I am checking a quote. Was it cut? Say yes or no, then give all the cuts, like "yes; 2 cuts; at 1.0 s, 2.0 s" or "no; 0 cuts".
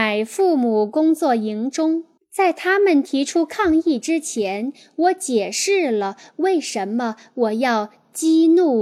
yes; 1 cut; at 2.2 s